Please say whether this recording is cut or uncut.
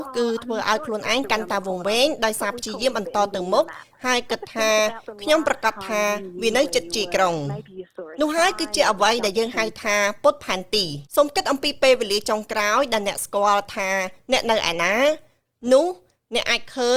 cut